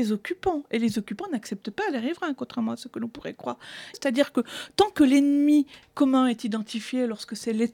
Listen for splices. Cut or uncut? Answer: cut